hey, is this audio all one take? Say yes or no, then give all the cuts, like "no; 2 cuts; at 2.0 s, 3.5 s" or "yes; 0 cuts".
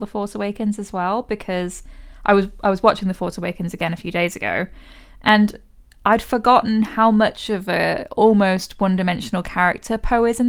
yes; 0 cuts